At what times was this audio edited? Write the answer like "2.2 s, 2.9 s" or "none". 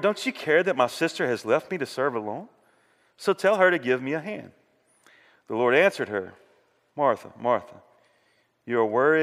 none